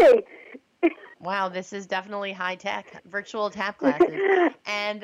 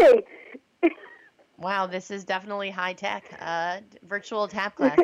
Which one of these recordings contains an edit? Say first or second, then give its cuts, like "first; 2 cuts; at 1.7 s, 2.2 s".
first; 2 cuts; at 1.1 s, 3.0 s